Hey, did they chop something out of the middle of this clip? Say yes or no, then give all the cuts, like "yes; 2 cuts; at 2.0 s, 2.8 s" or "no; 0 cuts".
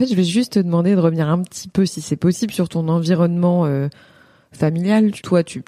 no; 0 cuts